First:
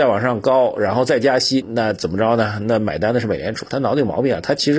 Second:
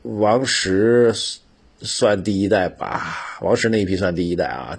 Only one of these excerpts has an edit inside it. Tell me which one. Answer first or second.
first